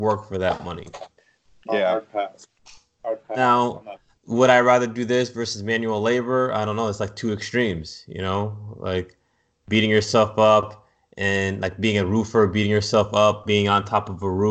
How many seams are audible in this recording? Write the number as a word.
zero